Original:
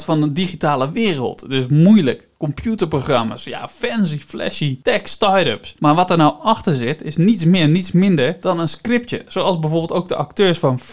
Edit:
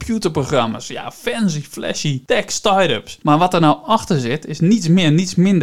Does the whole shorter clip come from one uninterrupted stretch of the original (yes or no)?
yes